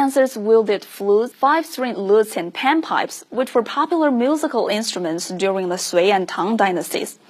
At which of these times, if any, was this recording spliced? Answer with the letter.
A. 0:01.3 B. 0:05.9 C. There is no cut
A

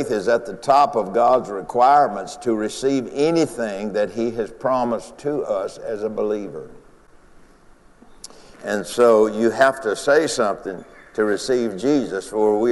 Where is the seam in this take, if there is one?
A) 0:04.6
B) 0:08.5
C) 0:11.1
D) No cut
B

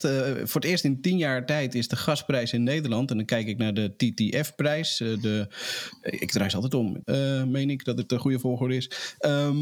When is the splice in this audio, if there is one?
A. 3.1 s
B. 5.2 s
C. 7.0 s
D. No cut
C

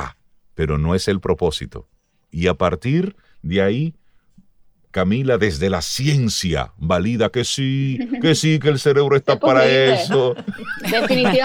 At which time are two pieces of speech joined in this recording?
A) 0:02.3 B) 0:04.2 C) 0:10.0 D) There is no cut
A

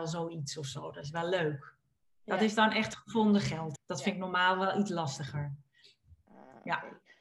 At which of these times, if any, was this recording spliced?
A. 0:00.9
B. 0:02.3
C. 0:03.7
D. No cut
C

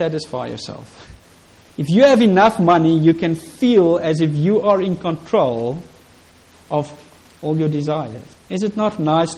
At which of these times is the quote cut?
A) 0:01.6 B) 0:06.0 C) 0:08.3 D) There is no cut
C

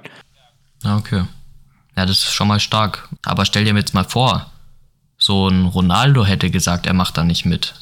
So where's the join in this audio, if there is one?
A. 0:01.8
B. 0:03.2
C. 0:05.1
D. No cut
B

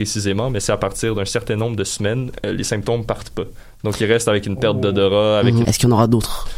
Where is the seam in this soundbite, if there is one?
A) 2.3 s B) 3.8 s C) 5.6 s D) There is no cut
C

